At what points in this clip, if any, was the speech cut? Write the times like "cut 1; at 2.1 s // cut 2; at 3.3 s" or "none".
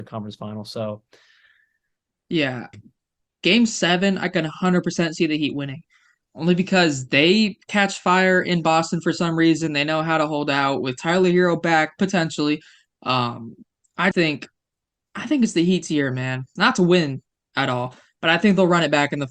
cut 1; at 2.7 s // cut 2; at 14.1 s // cut 3; at 16.6 s